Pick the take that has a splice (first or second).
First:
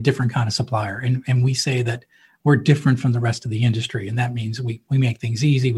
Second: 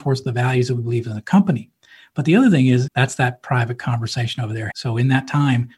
second